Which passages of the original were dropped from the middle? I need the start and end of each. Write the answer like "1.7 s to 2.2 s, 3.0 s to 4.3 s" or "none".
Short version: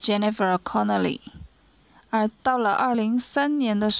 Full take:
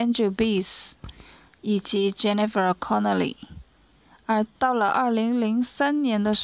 5.1 s to 5.4 s